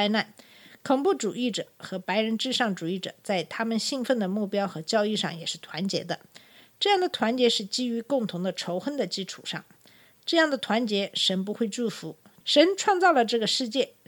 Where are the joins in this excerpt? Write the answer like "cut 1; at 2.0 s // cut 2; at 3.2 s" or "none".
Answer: cut 1; at 12.4 s